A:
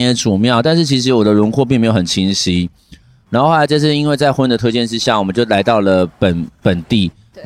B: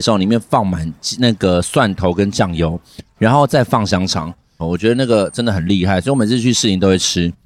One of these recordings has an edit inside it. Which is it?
B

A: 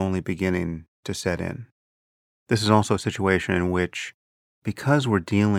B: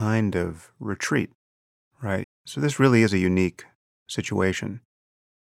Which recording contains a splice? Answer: B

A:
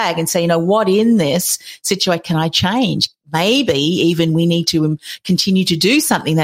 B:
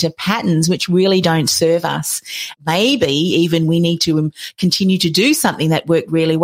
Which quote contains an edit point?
B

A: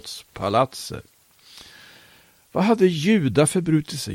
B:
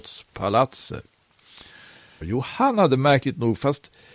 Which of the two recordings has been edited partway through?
B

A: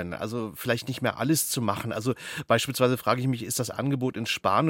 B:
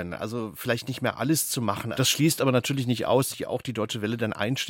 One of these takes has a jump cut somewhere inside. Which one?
B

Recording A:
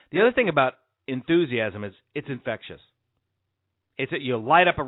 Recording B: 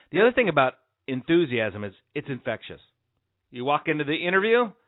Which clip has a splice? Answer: B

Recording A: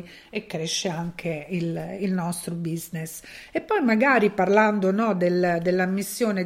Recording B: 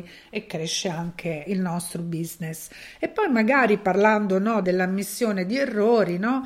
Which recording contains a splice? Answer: B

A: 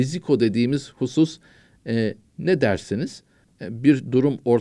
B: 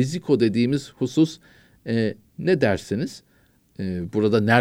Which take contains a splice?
A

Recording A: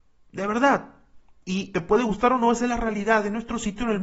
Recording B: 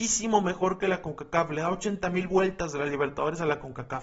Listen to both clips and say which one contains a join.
A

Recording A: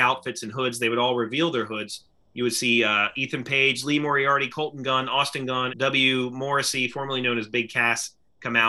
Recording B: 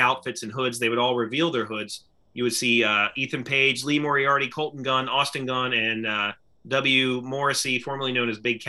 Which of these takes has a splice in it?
A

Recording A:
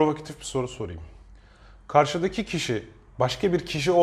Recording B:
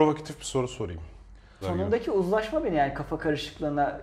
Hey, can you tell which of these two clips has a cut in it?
B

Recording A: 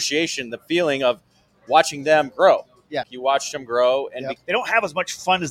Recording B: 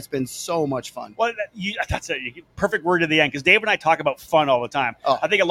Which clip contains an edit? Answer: A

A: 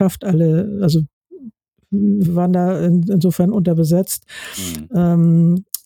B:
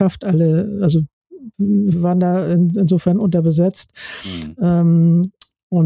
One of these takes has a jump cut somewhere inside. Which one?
B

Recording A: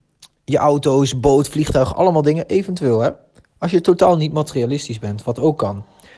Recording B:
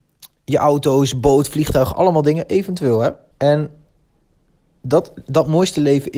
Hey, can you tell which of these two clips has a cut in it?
B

